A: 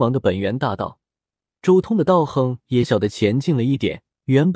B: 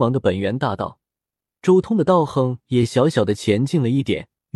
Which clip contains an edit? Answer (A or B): A